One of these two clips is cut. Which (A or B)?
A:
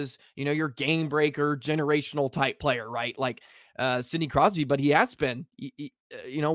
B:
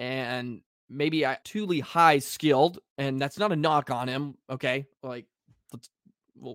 B